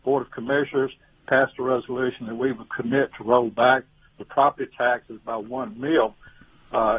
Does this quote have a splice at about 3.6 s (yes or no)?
no